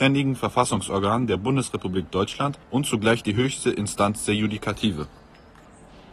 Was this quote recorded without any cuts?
no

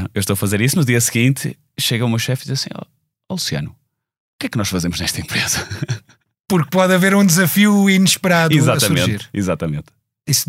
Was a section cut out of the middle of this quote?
no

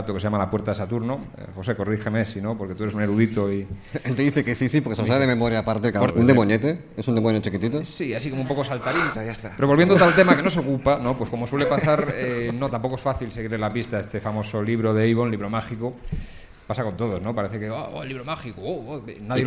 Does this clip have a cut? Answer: yes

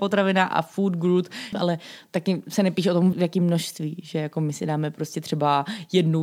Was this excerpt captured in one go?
no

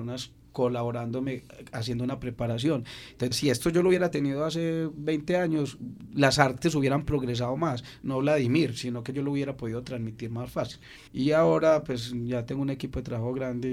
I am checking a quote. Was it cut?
yes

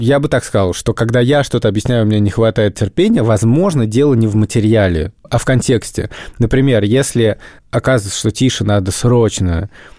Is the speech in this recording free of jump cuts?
yes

